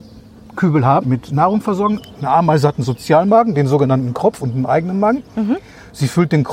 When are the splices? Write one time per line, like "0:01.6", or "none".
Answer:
0:01.0